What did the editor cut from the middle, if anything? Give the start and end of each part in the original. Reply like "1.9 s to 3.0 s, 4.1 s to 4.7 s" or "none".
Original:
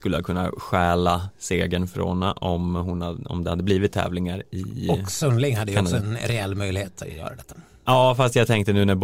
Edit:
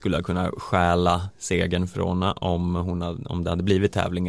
none